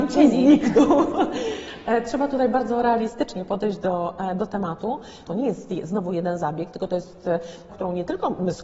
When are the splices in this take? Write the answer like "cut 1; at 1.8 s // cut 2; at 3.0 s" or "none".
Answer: cut 1; at 5.2 s // cut 2; at 7.7 s